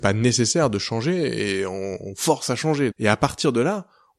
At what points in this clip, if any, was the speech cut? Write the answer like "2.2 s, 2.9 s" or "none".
2.9 s